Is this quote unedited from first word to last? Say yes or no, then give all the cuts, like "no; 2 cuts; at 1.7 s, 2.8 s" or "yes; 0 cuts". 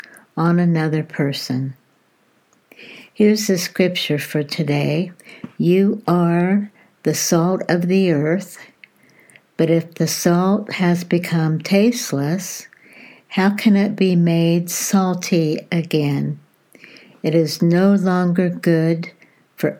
yes; 0 cuts